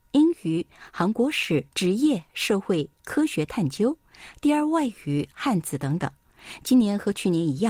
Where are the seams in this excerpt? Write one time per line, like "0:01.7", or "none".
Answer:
0:01.7